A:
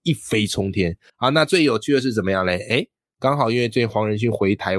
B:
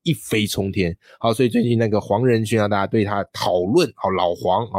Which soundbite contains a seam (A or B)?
A